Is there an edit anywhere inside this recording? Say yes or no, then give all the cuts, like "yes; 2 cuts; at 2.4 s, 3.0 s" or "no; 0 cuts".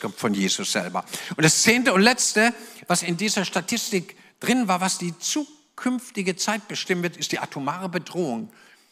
no; 0 cuts